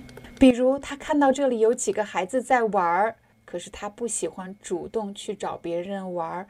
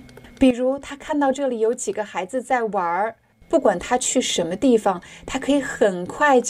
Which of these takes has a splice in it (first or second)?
second